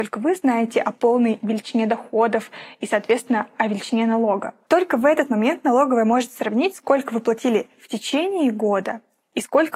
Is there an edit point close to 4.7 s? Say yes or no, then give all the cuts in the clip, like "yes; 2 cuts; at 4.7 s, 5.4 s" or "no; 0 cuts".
yes; 1 cut; at 4.7 s